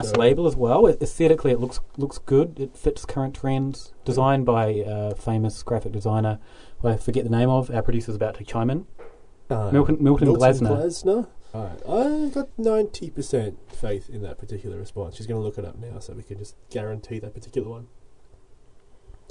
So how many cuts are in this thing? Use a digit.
1